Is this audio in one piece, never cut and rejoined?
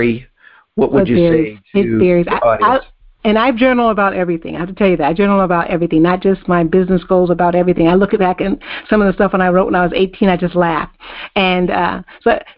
yes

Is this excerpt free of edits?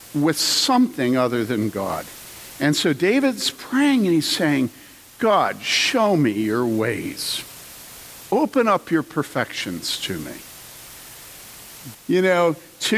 no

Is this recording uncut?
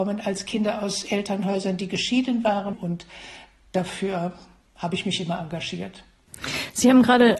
no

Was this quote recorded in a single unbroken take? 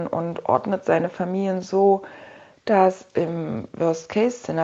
yes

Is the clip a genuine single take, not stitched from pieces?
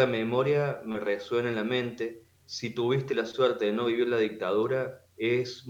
no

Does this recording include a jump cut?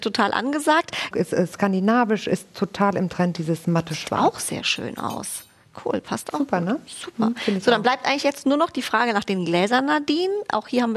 yes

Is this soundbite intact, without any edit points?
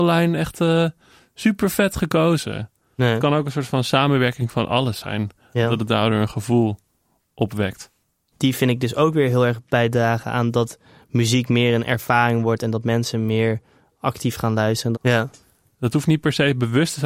no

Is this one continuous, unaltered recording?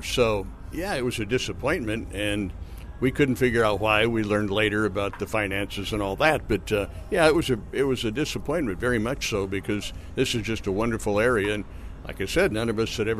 yes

